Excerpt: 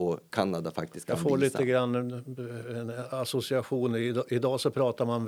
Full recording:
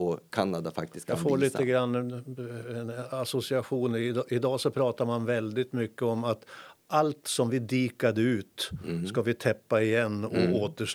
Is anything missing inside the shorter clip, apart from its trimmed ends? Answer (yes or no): no